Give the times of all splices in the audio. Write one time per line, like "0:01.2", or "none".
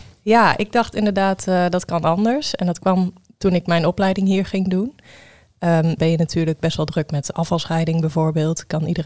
0:06.0